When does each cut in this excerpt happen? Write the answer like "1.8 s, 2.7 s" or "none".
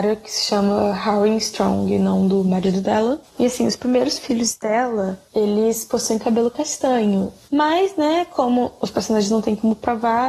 3.2 s, 7.5 s

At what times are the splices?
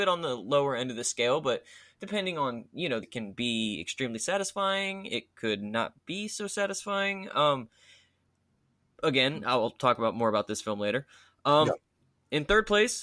3.0 s

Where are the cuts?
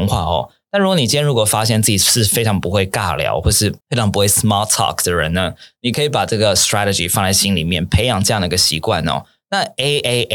3.8 s

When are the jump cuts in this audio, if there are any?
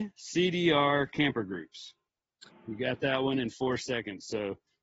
2.5 s

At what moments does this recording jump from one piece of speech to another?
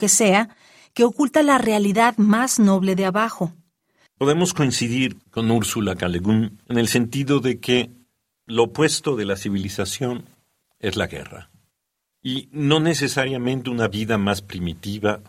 4.1 s

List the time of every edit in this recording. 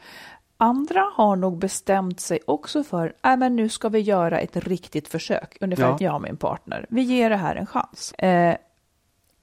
6.0 s, 8.1 s

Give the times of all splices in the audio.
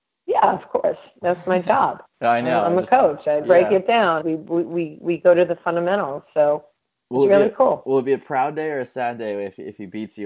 4.2 s

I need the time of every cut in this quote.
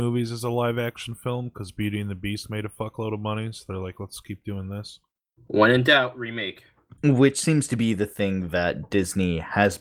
7.0 s

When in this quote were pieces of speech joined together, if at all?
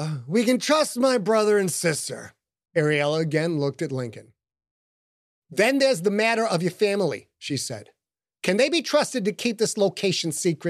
2.7 s

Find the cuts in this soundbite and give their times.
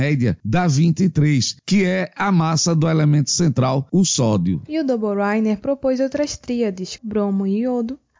4.7 s, 7.0 s

